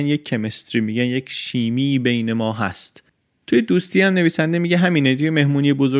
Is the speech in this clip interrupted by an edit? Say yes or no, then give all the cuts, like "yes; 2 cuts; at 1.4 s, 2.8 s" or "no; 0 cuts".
no; 0 cuts